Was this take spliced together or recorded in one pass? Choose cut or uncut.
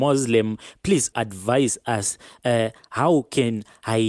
cut